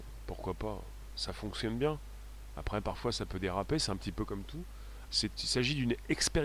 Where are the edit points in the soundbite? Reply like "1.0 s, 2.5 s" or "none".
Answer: 5.0 s